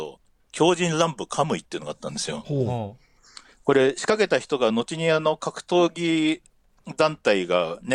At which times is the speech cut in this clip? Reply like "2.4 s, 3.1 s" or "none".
none